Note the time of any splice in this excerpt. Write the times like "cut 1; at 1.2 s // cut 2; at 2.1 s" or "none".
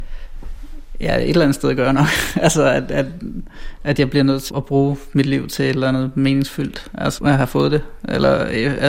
cut 1; at 4.5 s // cut 2; at 7.2 s

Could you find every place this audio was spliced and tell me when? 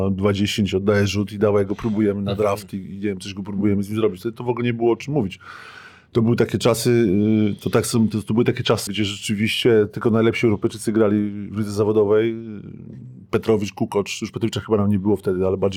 cut 1; at 8.9 s

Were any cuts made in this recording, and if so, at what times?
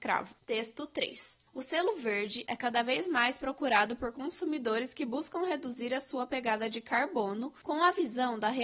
cut 1; at 2.5 s

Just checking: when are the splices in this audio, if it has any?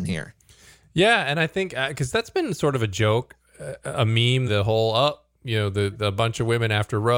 cut 1; at 4.5 s

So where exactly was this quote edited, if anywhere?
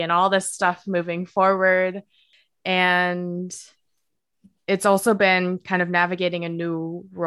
none

